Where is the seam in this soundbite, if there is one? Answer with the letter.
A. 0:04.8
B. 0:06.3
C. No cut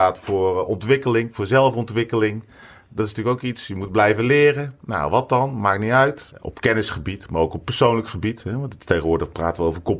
B